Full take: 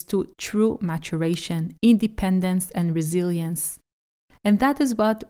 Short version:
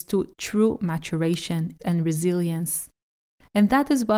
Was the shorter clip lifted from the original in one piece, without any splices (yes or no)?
no